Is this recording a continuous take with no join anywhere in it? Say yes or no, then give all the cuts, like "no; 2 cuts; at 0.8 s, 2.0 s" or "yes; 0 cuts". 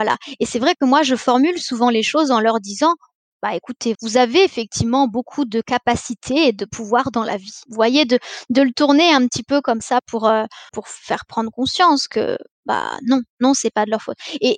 no; 3 cuts; at 3.9 s, 7.7 s, 10.7 s